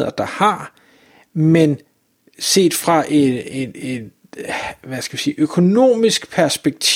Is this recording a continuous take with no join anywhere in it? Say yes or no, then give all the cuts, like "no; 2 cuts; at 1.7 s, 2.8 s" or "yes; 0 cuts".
yes; 0 cuts